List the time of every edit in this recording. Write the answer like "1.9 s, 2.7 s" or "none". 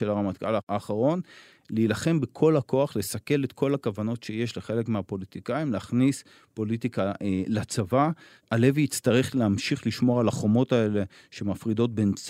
none